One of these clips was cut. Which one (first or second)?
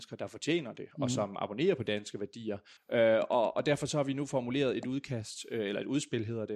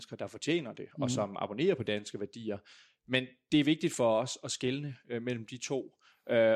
first